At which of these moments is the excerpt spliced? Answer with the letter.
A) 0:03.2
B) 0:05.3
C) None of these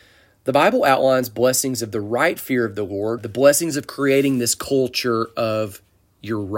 A